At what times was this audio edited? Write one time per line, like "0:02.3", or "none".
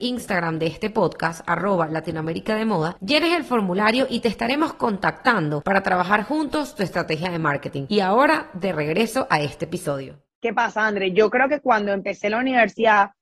none